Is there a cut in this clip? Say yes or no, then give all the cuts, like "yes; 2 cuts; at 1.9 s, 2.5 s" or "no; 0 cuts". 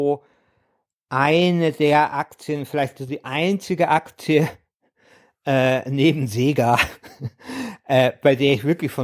no; 0 cuts